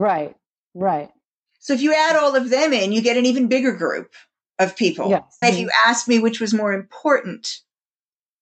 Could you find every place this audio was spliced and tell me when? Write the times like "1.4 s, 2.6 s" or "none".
5.4 s